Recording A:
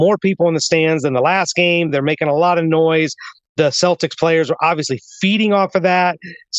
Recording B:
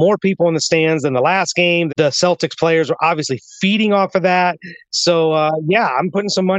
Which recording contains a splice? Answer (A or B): B